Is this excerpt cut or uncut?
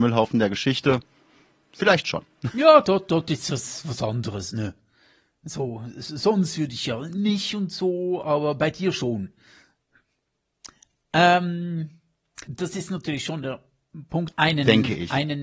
cut